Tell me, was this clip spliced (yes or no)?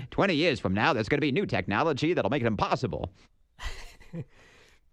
no